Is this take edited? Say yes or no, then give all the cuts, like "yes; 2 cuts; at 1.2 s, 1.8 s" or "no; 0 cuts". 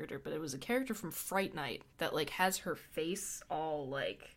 yes; 1 cut; at 1.9 s